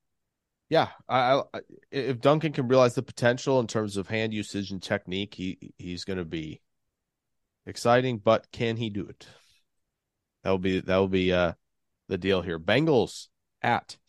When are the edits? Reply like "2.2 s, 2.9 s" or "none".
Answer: none

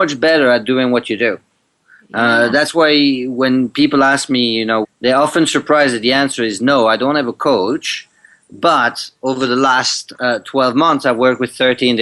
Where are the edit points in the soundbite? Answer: 4.8 s

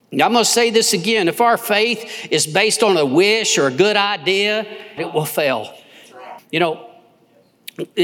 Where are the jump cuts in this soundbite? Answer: 5.0 s, 6.4 s

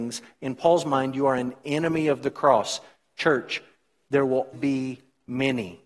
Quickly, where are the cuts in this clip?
4.5 s

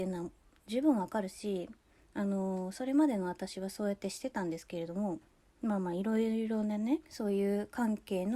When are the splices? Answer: 7.0 s

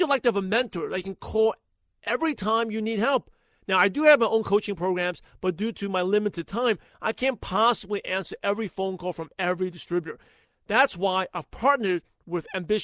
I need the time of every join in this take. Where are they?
none

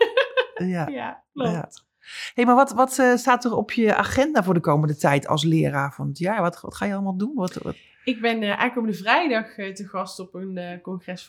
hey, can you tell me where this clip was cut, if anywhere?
none

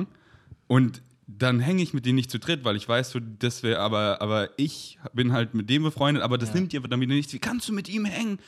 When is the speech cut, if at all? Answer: none

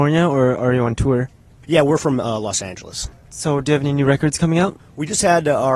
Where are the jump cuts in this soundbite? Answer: none

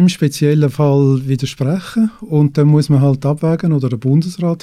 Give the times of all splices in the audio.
none

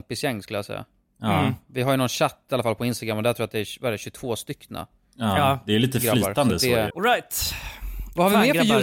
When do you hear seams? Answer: 6.9 s

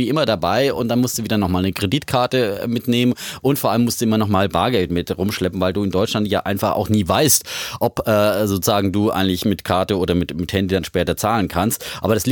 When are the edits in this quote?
none

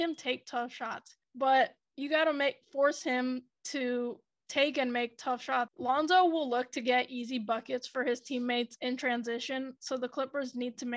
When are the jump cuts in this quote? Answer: 1.2 s, 5.7 s

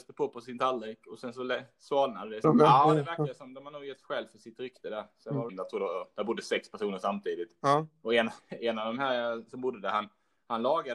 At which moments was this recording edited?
2.4 s, 5.5 s

